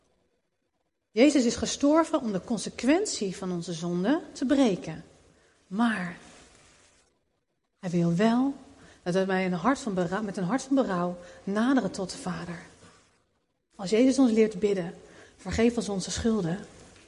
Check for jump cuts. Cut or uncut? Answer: cut